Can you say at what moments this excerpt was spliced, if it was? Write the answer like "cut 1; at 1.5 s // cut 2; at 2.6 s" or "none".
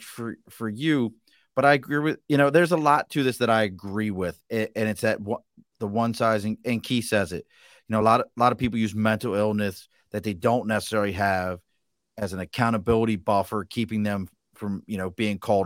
none